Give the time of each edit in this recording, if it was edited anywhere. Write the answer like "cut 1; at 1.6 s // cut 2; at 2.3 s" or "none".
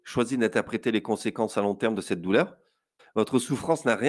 cut 1; at 3.0 s